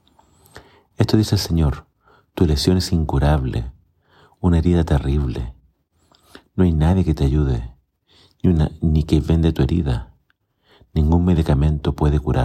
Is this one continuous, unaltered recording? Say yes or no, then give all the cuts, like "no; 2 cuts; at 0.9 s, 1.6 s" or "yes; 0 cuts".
yes; 0 cuts